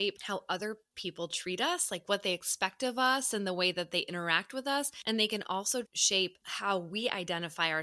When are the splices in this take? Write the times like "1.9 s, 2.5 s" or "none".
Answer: 5.8 s